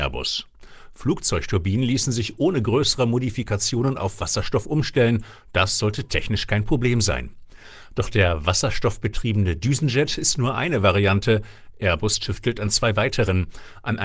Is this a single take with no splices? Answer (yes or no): yes